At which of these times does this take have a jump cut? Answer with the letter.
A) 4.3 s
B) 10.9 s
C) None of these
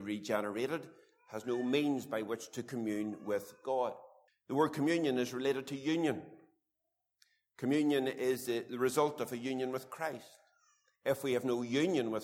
A